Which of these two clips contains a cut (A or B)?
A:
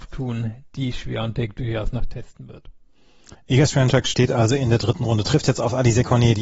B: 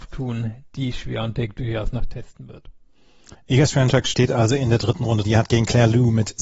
B